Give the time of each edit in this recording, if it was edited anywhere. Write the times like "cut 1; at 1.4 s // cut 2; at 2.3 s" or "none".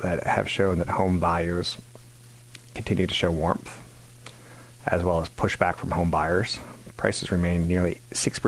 none